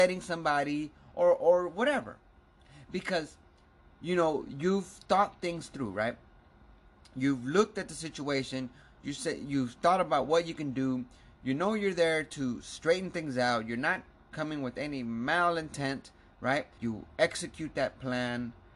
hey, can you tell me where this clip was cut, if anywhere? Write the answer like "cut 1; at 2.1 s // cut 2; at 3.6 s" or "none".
cut 1; at 16.8 s